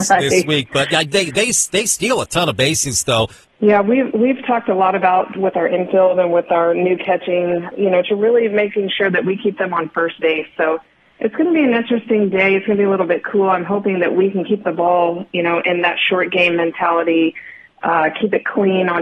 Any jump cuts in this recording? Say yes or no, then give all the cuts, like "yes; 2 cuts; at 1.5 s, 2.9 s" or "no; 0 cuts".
yes; 2 cuts; at 3.4 s, 7.7 s